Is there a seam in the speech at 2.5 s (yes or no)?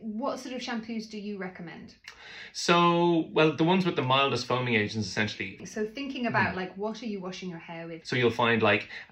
no